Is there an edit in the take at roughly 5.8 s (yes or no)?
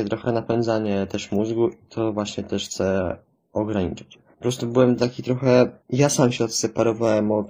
yes